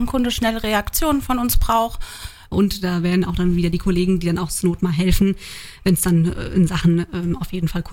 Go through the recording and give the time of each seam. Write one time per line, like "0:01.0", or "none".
0:02.5